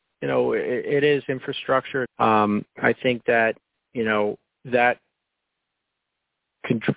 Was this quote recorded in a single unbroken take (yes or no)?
no